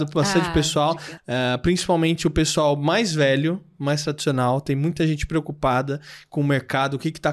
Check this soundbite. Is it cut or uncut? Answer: cut